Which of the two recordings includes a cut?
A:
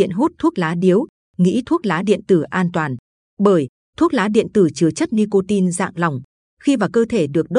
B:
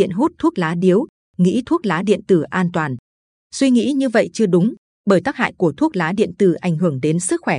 A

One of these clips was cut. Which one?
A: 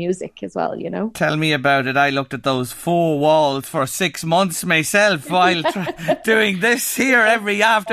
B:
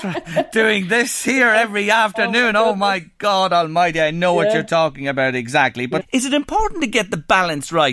B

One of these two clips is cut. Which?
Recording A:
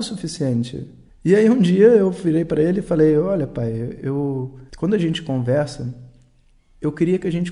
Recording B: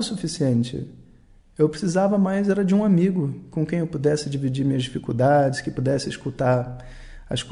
A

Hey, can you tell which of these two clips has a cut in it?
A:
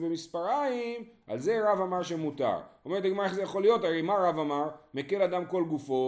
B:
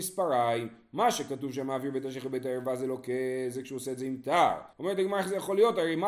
B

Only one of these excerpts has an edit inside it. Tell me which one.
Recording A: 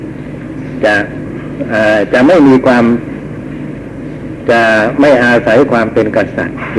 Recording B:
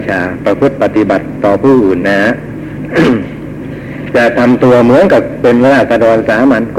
B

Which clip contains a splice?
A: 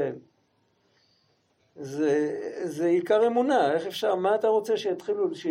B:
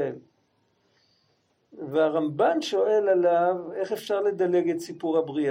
A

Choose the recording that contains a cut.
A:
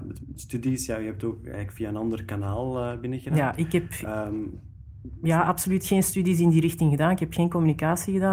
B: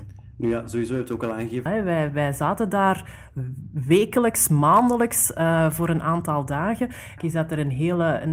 B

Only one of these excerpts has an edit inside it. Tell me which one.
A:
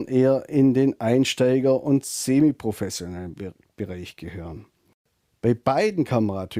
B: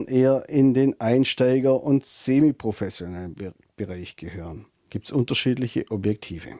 B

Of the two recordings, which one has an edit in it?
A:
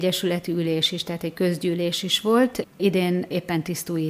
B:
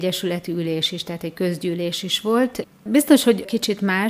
B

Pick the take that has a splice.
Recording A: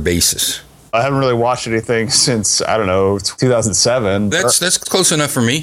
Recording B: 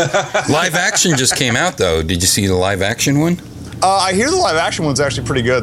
A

